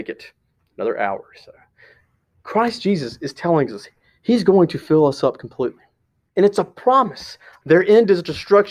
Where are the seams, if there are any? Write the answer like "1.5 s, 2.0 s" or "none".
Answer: 6.3 s, 7.6 s